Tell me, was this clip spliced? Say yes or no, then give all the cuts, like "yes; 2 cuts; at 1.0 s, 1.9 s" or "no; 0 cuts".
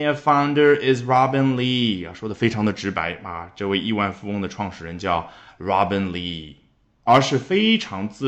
no; 0 cuts